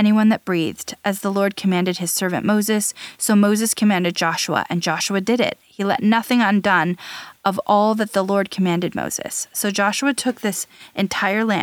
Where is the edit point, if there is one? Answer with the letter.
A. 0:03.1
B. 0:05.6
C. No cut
C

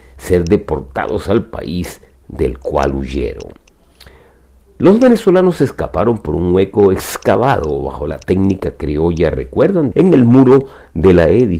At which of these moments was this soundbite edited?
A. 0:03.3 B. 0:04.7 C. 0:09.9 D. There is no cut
C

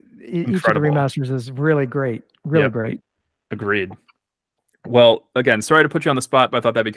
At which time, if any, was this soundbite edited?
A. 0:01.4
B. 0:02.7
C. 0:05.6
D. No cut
D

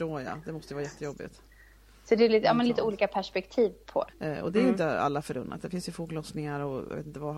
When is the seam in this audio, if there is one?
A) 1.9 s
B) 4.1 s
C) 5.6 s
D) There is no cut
B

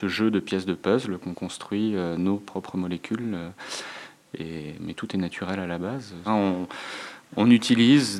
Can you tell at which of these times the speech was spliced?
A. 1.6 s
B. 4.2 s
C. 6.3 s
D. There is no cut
C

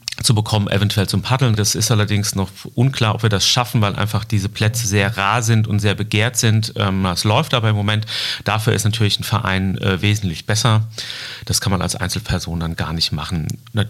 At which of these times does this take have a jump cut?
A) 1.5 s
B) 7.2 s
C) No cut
A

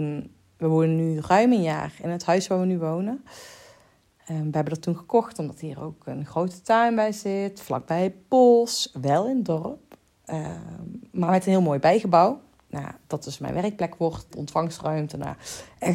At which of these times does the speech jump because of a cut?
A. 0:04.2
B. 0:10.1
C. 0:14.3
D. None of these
C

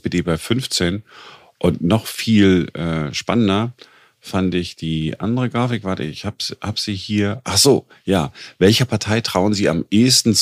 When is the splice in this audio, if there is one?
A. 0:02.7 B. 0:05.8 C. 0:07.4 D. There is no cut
D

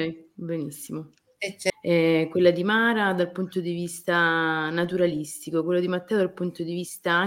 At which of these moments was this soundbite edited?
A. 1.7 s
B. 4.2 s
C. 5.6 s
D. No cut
A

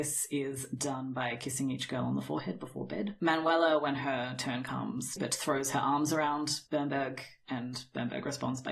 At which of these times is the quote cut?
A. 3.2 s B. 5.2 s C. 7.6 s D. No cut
B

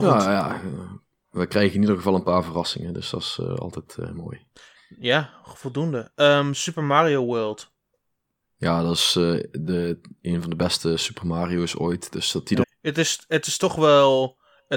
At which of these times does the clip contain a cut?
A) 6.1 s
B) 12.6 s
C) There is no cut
B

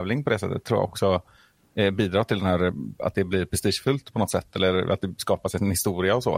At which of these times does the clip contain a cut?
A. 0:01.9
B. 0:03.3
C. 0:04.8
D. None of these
D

